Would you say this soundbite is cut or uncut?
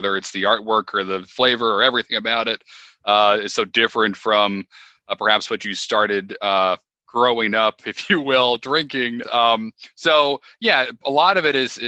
cut